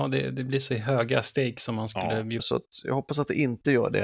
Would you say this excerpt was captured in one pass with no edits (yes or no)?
no